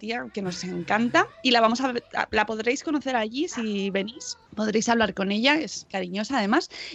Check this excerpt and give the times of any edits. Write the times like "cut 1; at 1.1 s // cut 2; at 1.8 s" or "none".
cut 1; at 4.5 s // cut 2; at 5.9 s